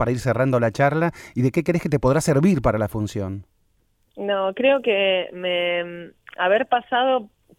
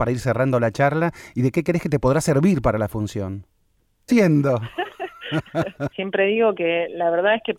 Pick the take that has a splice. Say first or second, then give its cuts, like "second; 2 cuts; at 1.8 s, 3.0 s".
second; 2 cuts; at 4.1 s, 5.9 s